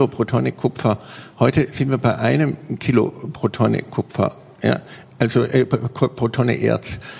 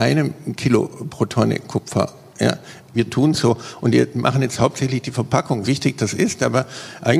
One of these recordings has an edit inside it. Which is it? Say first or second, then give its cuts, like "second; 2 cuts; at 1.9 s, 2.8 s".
second; 2 cuts; at 2.9 s, 5.6 s